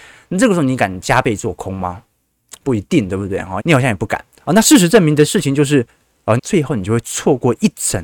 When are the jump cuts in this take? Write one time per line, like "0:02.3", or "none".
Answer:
0:03.6
0:06.4